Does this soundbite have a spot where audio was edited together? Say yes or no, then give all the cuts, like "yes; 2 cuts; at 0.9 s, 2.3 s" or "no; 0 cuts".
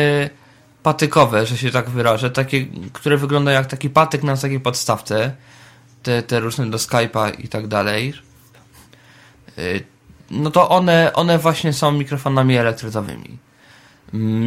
no; 0 cuts